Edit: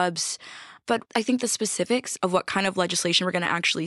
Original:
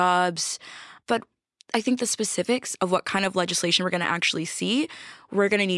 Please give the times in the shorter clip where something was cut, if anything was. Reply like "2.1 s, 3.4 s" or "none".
1.1 s